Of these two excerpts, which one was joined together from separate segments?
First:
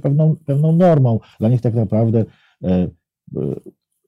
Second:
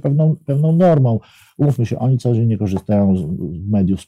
first; 1 cut; at 1.3 s

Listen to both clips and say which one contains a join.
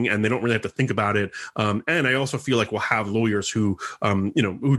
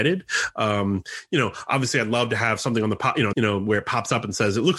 second; 1 cut; at 3.3 s

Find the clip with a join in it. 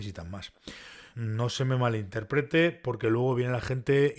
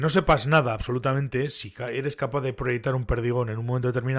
first; 1 cut; at 1.1 s

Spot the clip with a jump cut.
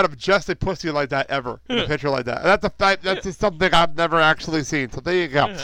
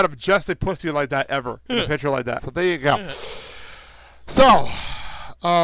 second; 1 cut; at 2.4 s

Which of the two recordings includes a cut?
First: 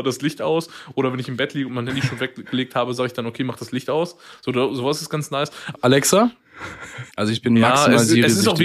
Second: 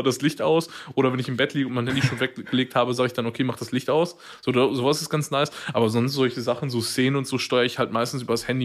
first; 2 cuts; at 5.7 s, 7.1 s

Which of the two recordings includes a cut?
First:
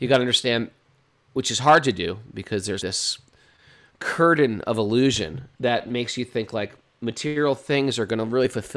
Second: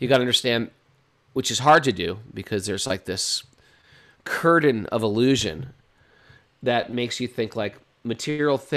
first; 2 cuts; at 2.8 s, 5.5 s

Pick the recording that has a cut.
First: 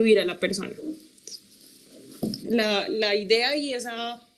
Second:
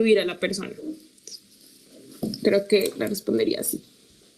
first; 1 cut; at 2.4 s

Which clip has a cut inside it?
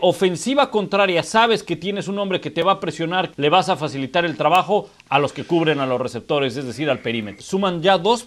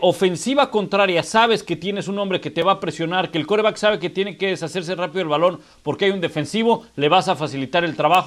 first; 2 cuts; at 3.3 s, 7.4 s

